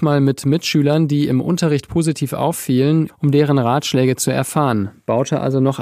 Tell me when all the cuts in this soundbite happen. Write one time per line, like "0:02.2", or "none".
0:03.1